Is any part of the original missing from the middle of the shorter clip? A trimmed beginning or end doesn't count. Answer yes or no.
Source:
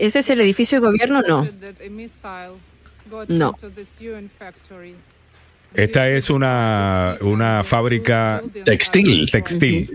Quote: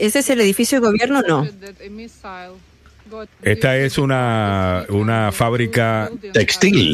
yes